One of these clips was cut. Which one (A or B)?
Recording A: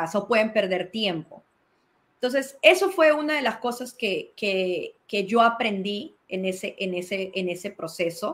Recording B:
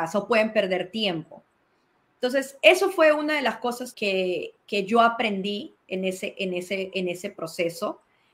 B